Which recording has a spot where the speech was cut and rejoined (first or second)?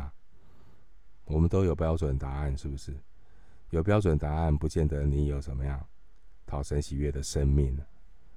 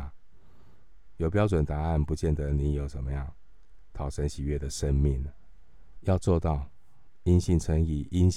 second